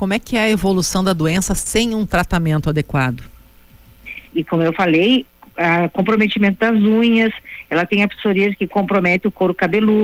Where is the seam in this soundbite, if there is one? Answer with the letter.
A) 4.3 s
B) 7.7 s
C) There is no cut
A